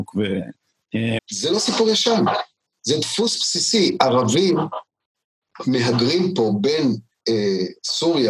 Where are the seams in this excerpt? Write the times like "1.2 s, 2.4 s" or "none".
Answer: 1.2 s